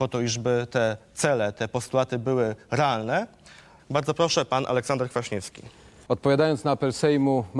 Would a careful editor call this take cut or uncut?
cut